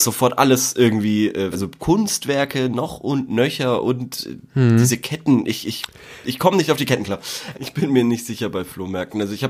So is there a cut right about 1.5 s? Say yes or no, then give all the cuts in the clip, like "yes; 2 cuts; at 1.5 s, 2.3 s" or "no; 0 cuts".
yes; 2 cuts; at 1.5 s, 7.5 s